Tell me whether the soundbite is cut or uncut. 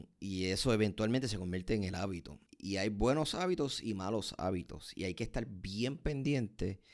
cut